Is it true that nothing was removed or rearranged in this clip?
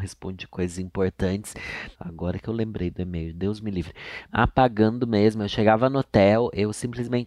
no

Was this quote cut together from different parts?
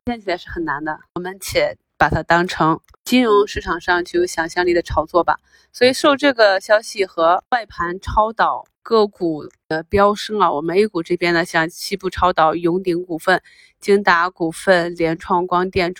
no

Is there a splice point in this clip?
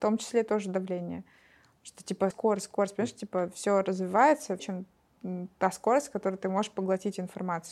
yes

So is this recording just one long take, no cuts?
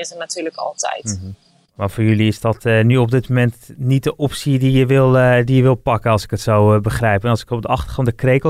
yes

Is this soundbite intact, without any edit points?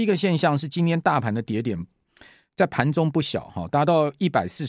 yes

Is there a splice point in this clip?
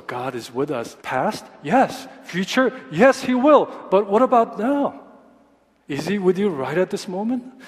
yes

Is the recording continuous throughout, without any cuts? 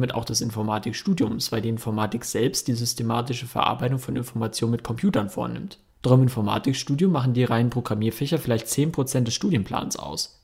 yes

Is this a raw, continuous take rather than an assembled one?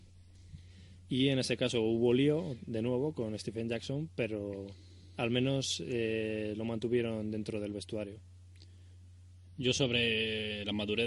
yes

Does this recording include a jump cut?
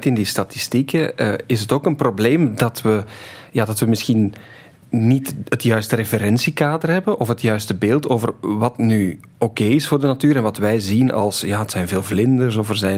no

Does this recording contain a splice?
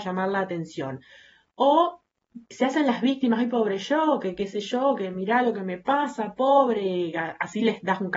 no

